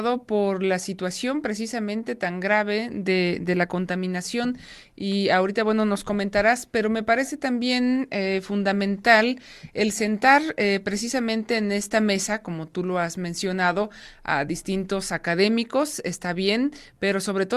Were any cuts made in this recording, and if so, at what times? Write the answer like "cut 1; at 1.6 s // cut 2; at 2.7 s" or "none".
none